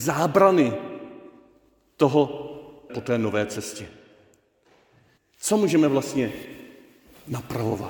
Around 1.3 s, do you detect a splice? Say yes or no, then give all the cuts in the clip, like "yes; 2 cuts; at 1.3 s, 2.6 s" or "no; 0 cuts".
no; 2 cuts; at 2.9 s, 5.2 s